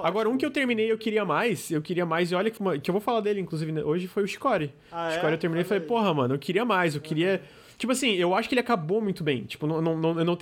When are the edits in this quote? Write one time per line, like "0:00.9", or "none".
0:02.6